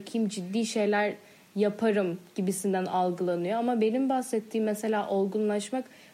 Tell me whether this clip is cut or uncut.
uncut